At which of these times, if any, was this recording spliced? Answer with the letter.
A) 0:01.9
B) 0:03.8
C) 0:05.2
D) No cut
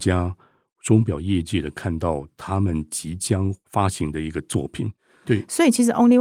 C